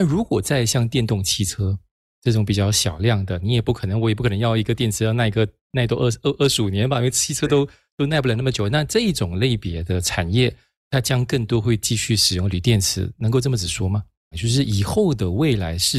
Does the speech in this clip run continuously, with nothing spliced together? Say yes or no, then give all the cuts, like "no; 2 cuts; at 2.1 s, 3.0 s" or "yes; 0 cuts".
no; 1 cut; at 14.3 s